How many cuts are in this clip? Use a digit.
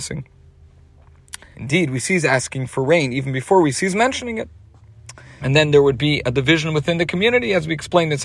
2